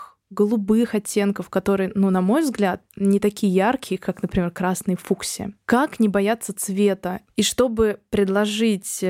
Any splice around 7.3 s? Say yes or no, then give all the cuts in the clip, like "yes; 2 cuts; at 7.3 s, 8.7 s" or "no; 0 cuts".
yes; 1 cut; at 7.3 s